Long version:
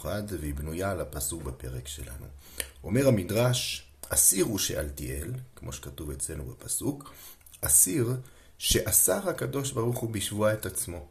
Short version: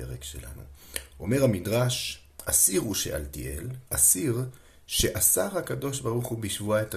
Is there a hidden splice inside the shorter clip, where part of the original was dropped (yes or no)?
yes